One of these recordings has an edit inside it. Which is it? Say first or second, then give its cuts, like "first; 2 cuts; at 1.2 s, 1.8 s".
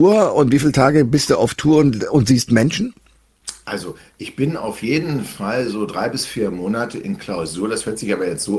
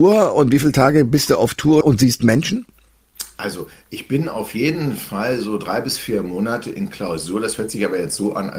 second; 1 cut; at 1.8 s